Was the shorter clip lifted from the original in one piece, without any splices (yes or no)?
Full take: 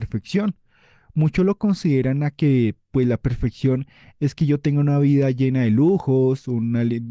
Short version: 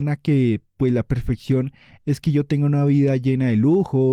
yes